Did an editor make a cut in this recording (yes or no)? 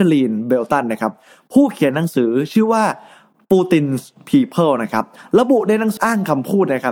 yes